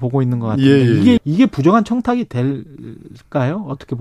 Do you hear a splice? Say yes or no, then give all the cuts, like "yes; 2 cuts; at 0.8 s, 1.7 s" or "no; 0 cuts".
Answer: yes; 1 cut; at 1.2 s